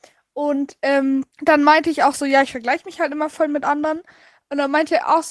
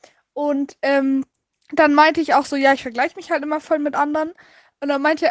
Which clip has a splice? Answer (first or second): first